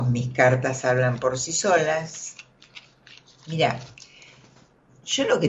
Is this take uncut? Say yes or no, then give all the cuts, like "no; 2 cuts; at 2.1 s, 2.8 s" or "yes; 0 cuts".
yes; 0 cuts